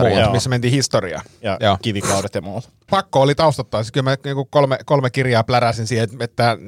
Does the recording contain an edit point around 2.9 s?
yes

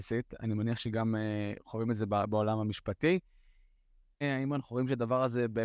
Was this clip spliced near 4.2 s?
yes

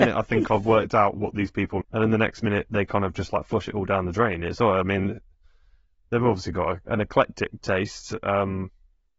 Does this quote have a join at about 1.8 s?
yes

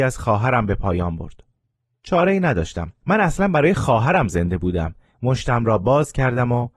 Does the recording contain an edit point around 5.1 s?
yes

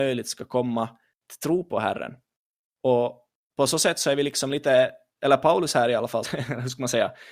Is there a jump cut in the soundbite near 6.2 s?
yes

